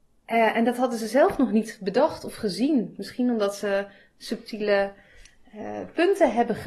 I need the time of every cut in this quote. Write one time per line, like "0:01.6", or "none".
none